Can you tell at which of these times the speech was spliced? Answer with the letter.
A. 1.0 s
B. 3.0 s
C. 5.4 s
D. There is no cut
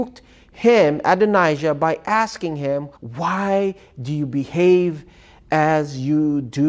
B